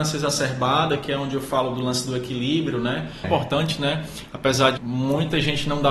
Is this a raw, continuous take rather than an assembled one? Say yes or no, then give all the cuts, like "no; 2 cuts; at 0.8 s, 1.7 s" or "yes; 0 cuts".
no; 2 cuts; at 3.2 s, 4.8 s